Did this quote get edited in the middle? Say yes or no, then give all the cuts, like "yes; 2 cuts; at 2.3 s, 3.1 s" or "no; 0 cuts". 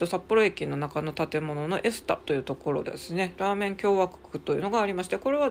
yes; 1 cut; at 2.8 s